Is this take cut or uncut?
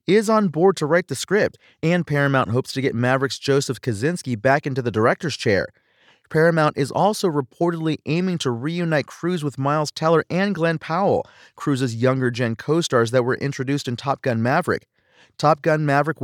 uncut